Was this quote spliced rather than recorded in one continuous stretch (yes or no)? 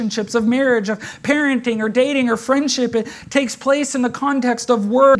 no